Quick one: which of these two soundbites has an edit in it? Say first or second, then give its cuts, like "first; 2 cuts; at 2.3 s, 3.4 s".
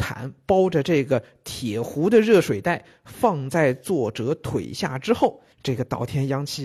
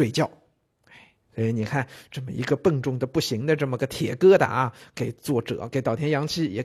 first; 1 cut; at 5.5 s